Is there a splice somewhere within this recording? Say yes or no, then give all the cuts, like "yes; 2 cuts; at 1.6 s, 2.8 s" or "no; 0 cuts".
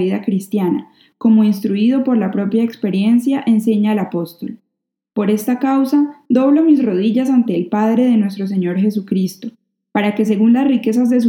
no; 0 cuts